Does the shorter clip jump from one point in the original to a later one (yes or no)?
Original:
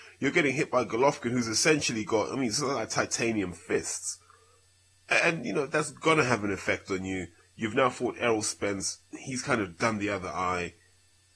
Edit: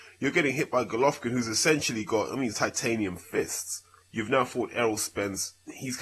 yes